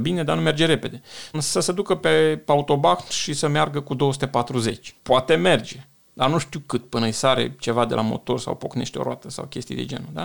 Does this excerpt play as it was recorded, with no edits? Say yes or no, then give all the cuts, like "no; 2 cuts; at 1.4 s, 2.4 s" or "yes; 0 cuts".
no; 2 cuts; at 1.3 s, 5.0 s